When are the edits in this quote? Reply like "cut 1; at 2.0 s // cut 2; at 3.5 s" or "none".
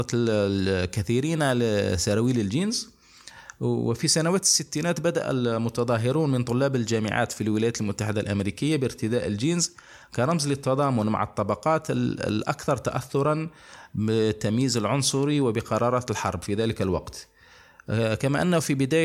none